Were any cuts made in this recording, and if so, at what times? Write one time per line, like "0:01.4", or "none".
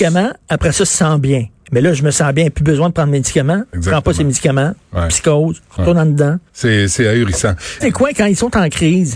0:06.5
0:07.8